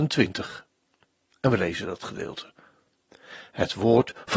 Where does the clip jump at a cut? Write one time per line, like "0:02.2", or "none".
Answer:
none